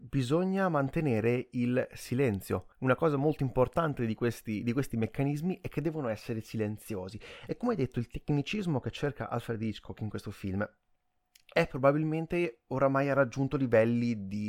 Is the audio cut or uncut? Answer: cut